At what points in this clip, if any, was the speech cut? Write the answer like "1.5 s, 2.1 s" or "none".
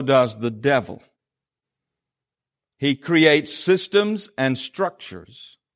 2.6 s

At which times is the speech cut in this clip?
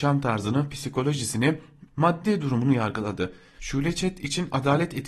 1.9 s, 3.6 s

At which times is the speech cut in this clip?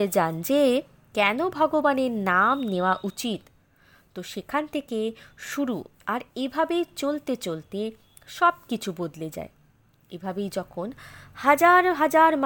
none

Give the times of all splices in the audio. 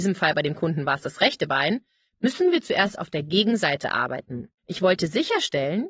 4.6 s

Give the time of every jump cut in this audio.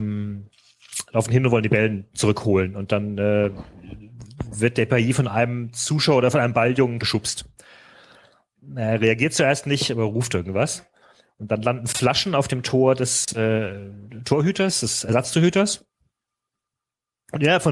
7.0 s

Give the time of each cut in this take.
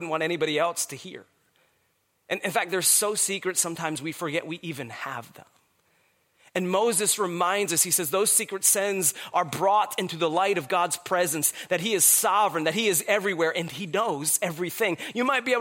none

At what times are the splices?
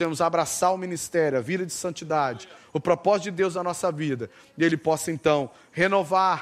none

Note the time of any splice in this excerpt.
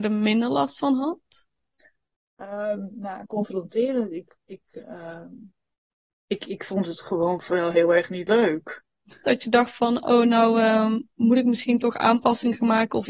9.2 s

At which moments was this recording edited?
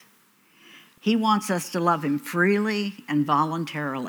1.0 s

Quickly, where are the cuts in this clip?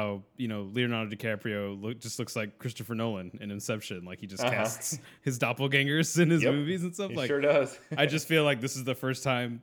none

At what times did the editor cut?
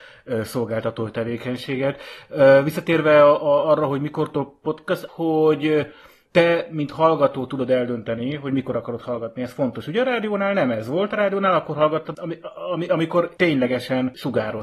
5.1 s, 12.1 s

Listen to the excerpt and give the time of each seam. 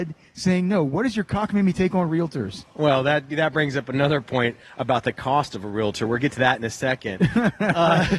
none

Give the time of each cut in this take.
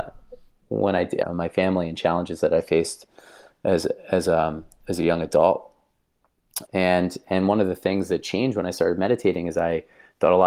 1.2 s, 6.6 s

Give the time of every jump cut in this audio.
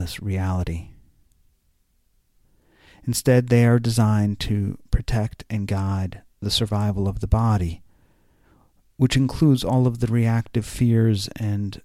none

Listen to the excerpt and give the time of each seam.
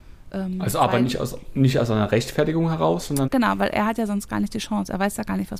3.2 s

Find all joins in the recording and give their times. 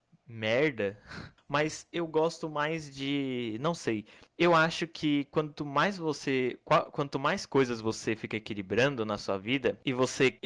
1.4 s

